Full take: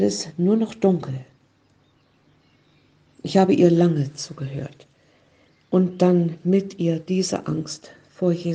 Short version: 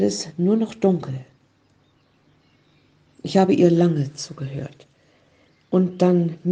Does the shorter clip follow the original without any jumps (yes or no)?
yes